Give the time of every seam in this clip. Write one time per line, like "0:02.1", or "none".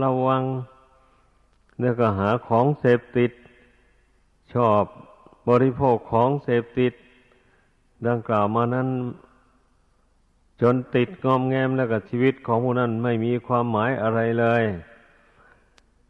none